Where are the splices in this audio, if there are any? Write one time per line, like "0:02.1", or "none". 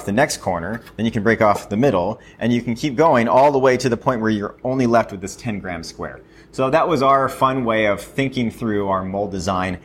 none